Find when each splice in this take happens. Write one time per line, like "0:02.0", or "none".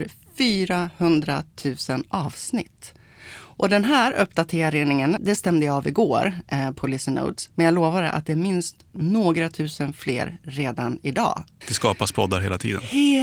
0:05.2
0:11.6